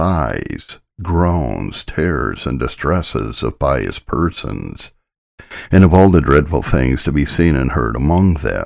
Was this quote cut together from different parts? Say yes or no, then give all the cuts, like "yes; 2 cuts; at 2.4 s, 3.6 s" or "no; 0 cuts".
no; 0 cuts